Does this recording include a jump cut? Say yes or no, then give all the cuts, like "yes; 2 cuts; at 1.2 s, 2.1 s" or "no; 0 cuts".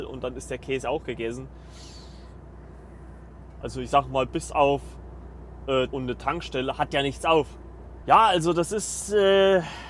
yes; 3 cuts; at 3.6 s, 5.9 s, 8.0 s